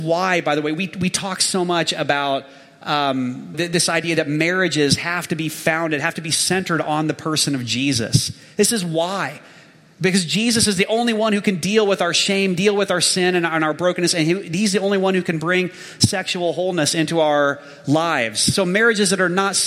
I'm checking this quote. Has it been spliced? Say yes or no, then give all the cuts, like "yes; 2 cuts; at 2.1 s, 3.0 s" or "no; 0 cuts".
yes; 1 cut; at 3.5 s